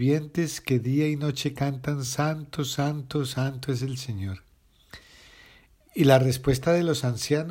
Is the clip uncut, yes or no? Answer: yes